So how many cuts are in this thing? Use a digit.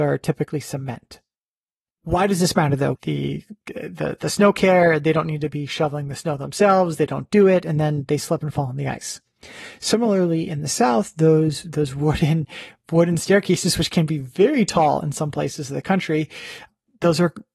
1